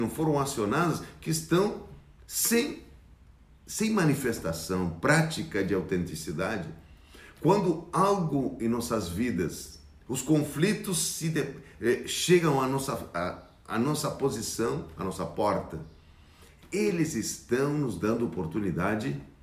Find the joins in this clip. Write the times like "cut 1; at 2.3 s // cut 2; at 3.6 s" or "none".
cut 1; at 10.1 s

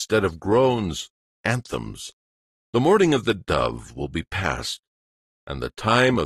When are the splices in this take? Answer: cut 1; at 2.7 s

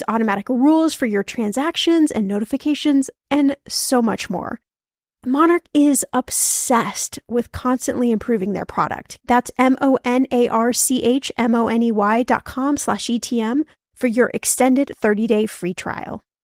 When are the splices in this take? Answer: cut 1; at 9.2 s

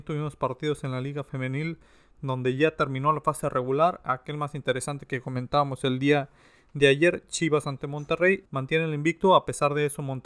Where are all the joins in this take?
cut 1; at 8.5 s

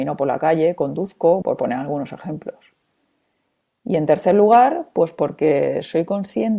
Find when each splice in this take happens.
cut 1; at 1.4 s

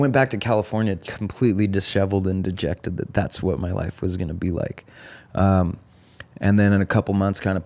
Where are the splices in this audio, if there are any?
none

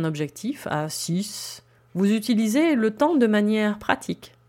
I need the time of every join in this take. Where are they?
cut 1; at 1.8 s

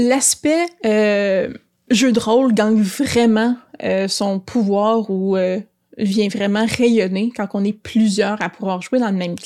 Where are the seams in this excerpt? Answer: none

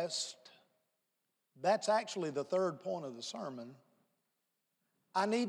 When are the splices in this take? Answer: none

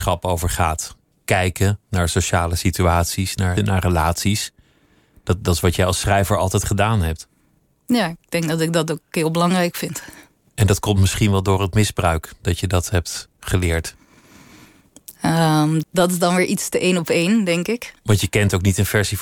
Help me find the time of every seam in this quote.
cut 1; at 3.6 s // cut 2; at 15.8 s

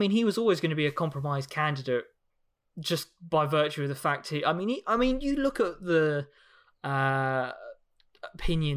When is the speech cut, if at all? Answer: none

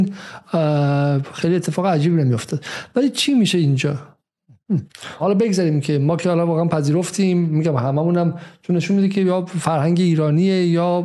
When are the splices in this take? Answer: cut 1; at 5.2 s

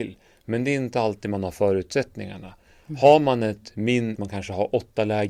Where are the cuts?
cut 1; at 4.2 s

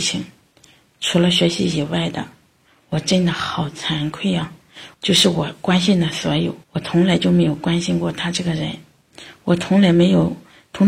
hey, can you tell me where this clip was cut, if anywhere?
cut 1; at 4.9 s // cut 2; at 6.6 s

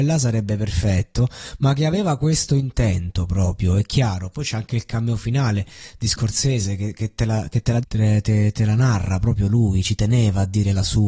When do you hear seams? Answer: cut 1; at 7.8 s

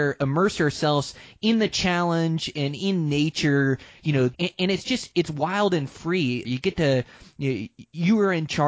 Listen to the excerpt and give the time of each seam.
cut 1; at 4.3 s // cut 2; at 6.4 s

